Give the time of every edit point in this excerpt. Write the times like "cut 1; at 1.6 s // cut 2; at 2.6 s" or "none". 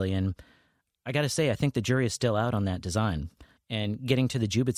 cut 1; at 3.6 s

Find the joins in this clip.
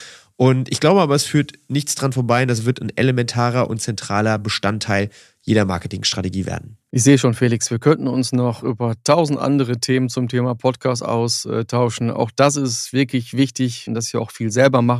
cut 1; at 13.9 s

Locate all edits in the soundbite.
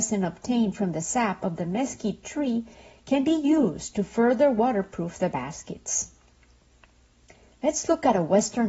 none

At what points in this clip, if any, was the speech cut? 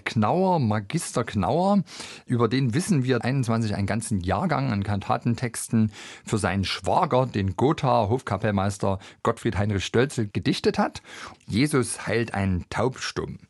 cut 1; at 3.2 s // cut 2; at 11.3 s

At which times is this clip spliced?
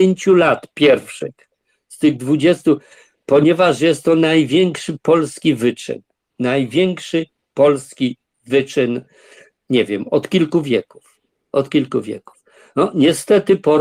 none

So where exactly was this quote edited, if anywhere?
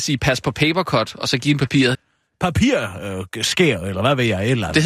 cut 1; at 1.9 s

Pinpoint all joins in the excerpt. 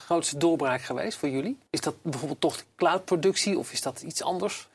cut 1; at 1.7 s

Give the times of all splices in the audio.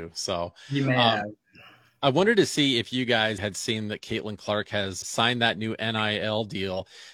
cut 1; at 3.4 s // cut 2; at 5.0 s

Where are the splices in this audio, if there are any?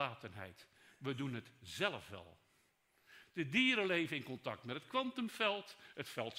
none

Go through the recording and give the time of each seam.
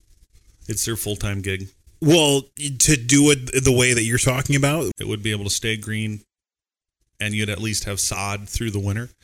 cut 1; at 4.9 s

